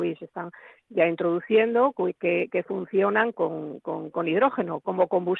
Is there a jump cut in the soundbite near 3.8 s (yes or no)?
no